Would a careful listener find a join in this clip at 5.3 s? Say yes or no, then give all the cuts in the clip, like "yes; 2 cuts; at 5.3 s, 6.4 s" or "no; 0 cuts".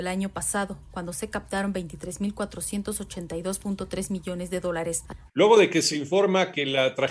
yes; 1 cut; at 5.3 s